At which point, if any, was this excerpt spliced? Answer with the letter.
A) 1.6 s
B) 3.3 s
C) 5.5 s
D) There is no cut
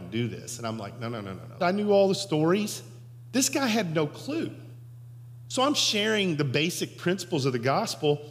A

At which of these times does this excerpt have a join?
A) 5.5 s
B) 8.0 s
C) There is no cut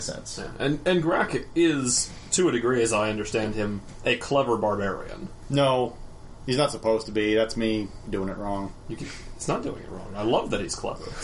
B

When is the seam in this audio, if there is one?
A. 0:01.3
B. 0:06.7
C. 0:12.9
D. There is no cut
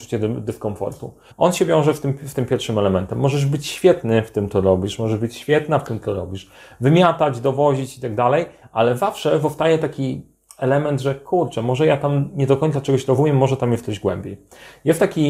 A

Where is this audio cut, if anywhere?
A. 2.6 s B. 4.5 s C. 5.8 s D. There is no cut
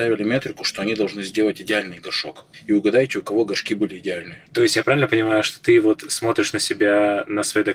B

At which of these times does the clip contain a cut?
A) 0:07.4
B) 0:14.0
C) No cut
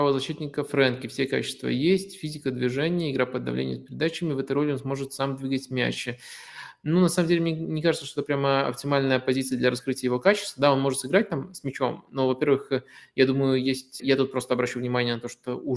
B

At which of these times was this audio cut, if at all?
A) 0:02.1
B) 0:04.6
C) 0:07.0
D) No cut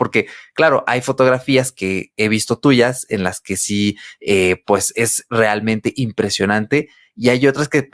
D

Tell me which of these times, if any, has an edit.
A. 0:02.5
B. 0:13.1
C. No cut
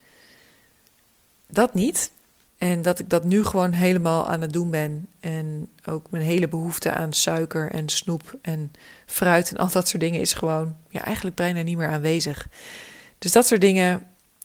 A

